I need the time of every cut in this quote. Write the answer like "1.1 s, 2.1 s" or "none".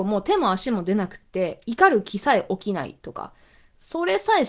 none